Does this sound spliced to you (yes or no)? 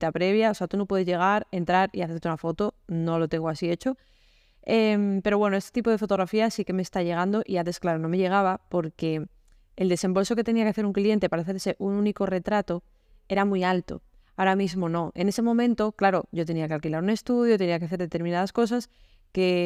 no